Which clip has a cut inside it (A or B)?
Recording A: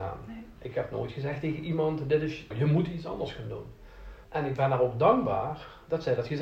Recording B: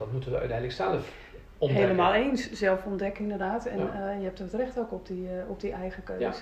A